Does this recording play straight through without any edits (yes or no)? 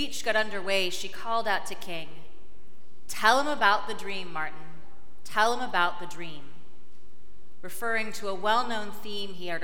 yes